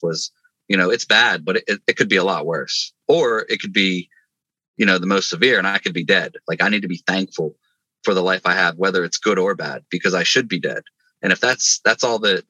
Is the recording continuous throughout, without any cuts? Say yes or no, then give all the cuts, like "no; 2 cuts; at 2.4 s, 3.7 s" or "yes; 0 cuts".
yes; 0 cuts